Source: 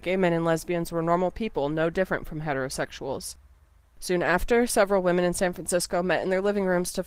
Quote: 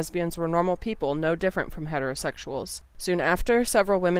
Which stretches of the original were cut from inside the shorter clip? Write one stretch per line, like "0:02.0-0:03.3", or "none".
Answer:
0:03.4-0:03.9